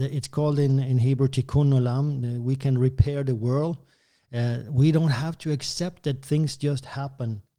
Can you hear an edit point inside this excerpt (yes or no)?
no